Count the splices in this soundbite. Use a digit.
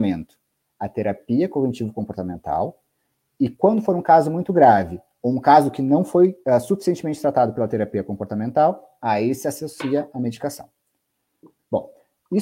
1